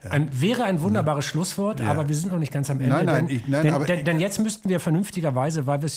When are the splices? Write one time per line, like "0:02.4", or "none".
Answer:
none